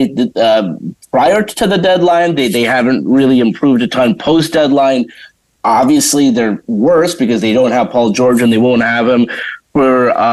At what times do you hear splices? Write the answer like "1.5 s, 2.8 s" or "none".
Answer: none